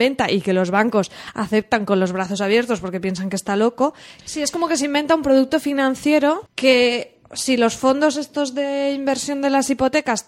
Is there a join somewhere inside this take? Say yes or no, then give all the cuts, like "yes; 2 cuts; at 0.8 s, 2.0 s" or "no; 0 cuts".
yes; 2 cuts; at 4.2 s, 6.5 s